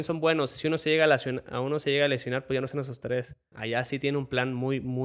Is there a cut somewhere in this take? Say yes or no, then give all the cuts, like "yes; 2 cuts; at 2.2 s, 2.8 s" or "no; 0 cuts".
yes; 1 cut; at 3.5 s